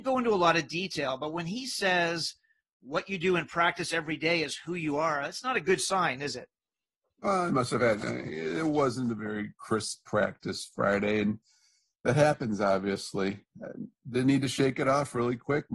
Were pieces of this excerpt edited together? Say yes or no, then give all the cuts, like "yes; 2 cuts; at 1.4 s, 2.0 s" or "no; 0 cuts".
no; 0 cuts